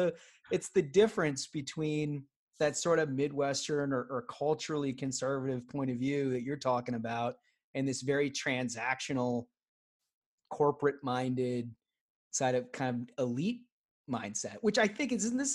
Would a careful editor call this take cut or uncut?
uncut